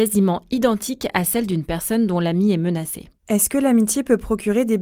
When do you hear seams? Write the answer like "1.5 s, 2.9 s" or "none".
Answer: 3.2 s